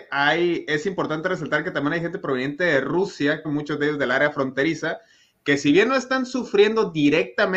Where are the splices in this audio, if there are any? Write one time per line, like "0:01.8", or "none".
0:03.4